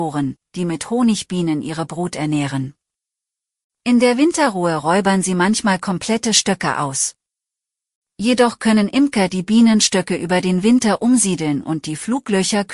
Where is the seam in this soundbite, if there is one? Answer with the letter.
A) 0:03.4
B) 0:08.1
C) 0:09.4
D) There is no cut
D